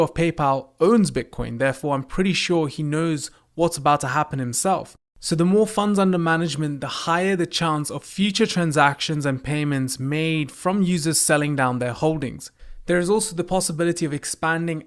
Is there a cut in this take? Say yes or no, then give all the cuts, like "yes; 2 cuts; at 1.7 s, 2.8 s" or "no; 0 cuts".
no; 0 cuts